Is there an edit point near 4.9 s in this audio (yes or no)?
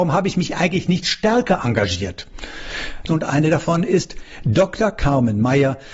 no